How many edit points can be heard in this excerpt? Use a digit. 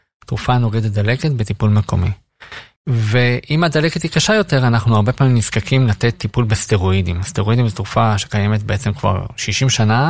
1